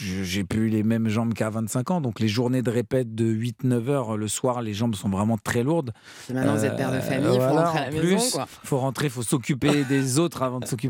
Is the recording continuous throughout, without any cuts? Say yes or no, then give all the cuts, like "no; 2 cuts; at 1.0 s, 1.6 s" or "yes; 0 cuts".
yes; 0 cuts